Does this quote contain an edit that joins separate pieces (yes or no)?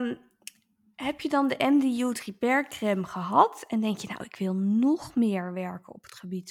no